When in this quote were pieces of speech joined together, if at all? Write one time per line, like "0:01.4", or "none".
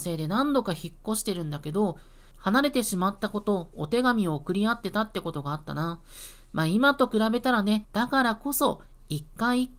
0:07.8